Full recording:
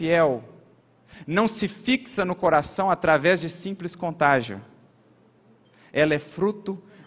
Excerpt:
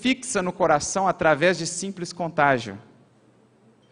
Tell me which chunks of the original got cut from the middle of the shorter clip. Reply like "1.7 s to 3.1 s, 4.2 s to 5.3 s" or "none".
none